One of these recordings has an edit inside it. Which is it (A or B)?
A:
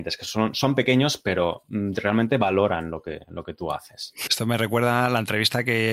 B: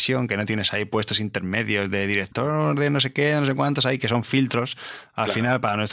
A